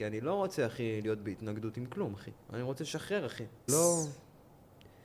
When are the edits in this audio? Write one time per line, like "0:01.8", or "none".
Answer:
0:02.4
0:03.7